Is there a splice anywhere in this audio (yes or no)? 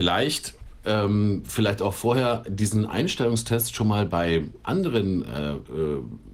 no